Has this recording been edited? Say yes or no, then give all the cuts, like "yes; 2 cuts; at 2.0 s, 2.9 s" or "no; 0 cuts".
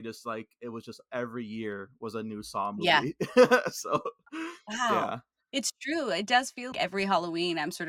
yes; 1 cut; at 6.7 s